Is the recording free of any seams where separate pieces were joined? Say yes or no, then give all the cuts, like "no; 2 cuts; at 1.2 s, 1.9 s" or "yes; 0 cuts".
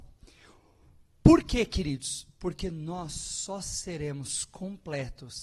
yes; 0 cuts